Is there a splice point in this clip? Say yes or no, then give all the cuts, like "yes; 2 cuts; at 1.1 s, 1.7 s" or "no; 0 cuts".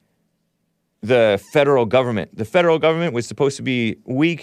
no; 0 cuts